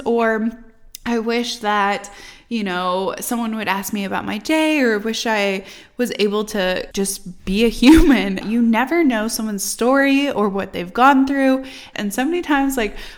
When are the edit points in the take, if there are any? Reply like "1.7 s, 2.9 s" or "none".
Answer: 6.9 s, 8.4 s, 11.9 s